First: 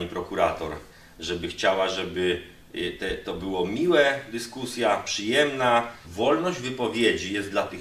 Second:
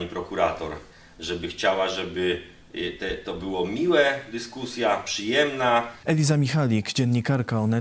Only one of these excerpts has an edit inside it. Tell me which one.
second; 1 cut; at 6.0 s

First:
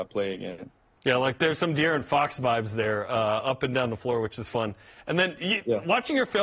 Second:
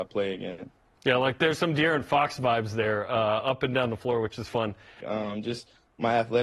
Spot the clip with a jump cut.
second; 1 cut; at 5.0 s

